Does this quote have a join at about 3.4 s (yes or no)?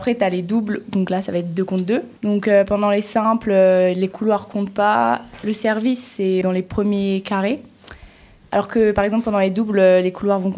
no